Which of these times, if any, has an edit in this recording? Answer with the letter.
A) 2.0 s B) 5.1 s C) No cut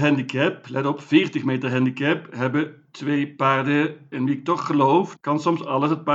B